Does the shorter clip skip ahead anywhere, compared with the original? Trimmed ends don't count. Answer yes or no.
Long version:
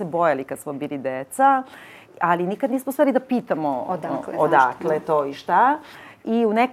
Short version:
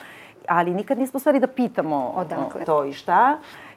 yes